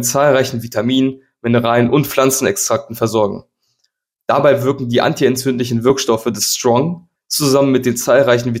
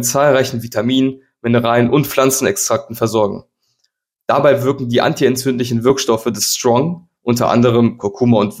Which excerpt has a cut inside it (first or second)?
first